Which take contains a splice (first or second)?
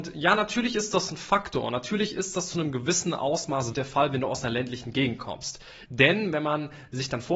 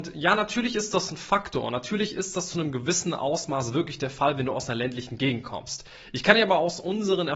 first